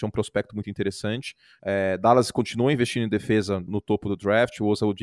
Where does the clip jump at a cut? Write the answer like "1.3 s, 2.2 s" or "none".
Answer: 1.6 s, 3.7 s